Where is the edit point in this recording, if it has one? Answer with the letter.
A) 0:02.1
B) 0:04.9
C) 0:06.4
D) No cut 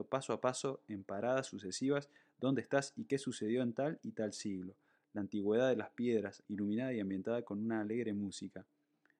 C